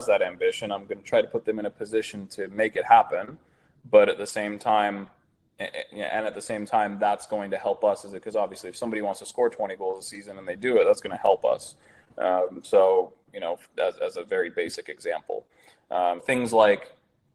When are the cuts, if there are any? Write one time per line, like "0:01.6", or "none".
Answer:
0:16.2